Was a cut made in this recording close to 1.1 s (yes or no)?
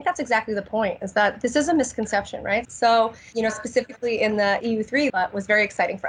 no